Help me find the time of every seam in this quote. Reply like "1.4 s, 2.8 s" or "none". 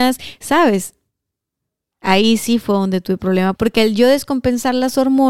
1.9 s, 3.5 s